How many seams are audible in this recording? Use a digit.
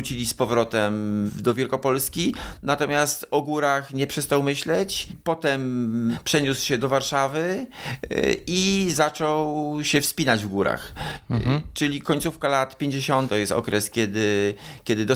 1